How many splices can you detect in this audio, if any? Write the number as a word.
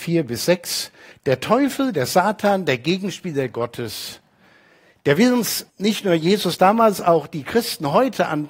two